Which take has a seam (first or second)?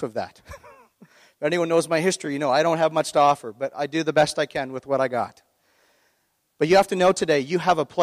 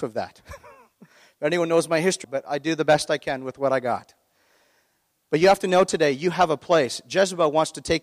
second